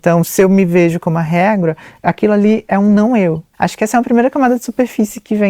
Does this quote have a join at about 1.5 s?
no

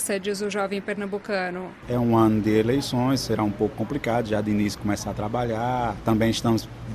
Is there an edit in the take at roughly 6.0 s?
no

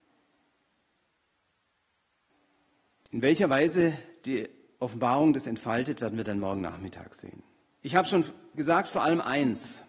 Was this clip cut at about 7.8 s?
yes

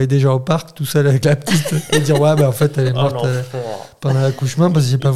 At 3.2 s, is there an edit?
no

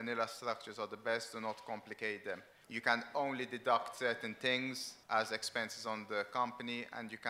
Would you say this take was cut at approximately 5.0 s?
yes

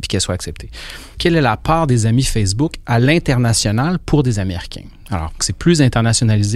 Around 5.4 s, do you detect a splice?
yes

